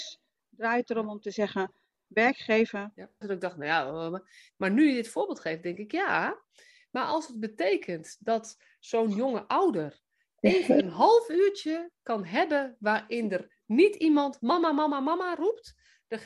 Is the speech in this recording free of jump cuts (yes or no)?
no